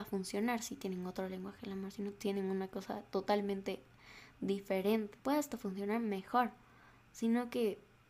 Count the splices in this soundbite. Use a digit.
1